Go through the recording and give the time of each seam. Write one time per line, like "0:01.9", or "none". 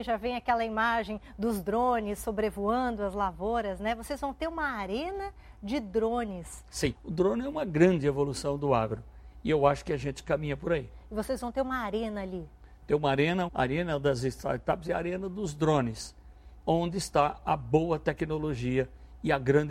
0:06.9
0:13.5